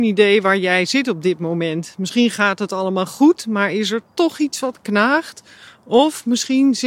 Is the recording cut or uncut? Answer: uncut